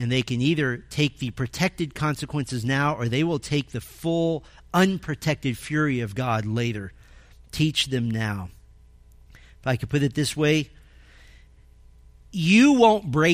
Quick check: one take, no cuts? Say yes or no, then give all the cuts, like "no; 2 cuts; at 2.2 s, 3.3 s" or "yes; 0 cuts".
yes; 0 cuts